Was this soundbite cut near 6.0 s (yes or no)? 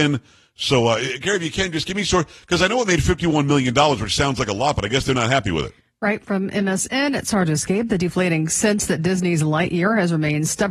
no